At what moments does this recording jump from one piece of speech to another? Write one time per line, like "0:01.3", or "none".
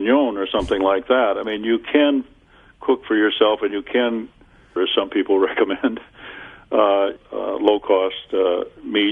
0:04.8
0:07.2